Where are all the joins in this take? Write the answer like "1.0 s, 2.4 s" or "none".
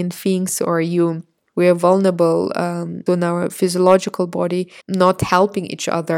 1.5 s, 3.1 s, 4.8 s

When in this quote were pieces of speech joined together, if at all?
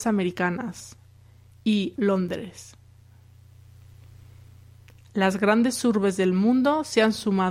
2.0 s

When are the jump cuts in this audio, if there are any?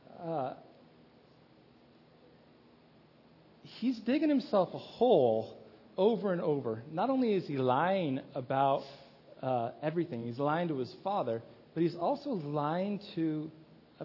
none

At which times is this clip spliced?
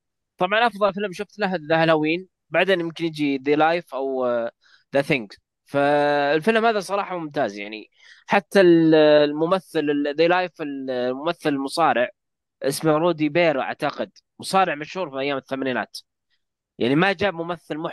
none

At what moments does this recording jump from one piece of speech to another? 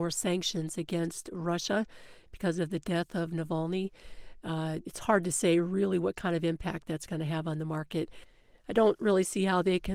4.8 s

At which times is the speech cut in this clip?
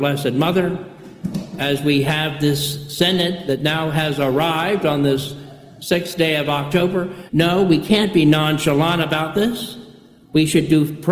7.3 s

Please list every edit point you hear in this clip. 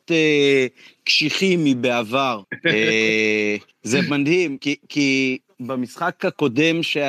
2.4 s, 4.6 s

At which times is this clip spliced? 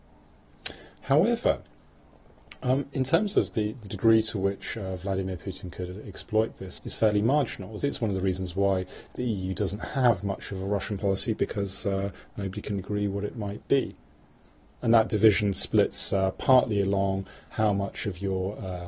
6.8 s, 7.8 s, 12.8 s

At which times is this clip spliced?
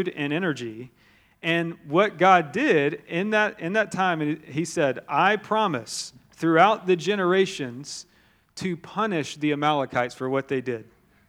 none

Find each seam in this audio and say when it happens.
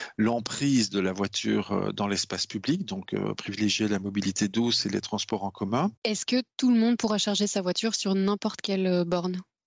none

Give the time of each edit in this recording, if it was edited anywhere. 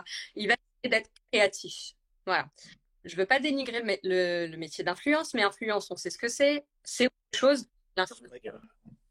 none

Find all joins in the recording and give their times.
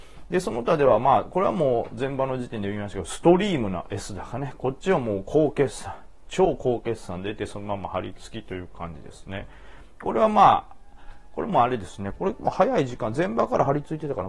9.9 s

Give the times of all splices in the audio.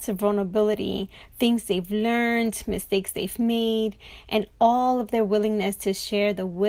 none

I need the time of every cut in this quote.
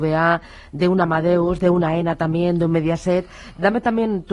none

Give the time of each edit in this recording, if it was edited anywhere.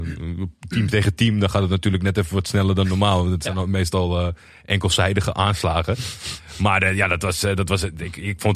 none

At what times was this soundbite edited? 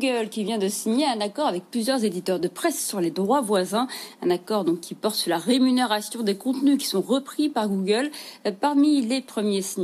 none

